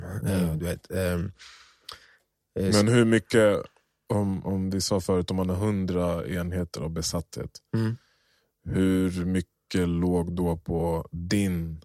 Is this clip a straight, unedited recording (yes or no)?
yes